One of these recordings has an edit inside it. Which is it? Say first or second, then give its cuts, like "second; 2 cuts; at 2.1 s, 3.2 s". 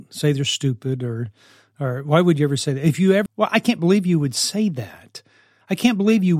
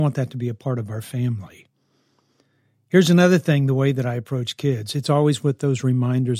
first; 1 cut; at 3.3 s